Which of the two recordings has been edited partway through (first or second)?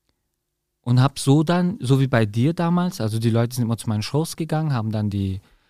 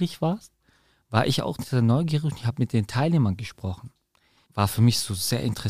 second